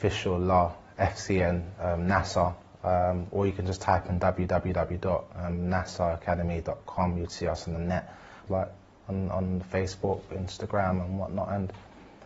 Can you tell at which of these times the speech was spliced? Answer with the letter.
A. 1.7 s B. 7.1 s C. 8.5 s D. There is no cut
C